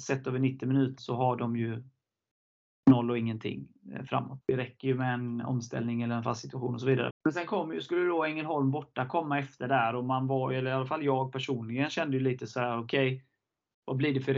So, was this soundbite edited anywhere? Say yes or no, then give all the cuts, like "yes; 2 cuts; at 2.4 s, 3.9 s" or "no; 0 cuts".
yes; 3 cuts; at 1.0 s, 4.4 s, 7.1 s